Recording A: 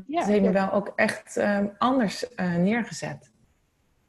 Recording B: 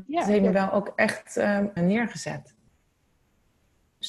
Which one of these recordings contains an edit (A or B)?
B